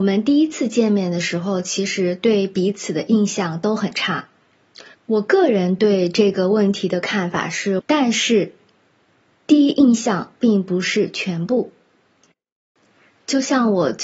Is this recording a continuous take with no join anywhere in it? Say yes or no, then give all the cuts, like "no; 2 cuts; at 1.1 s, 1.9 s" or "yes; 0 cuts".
no; 2 cuts; at 4.9 s, 7.8 s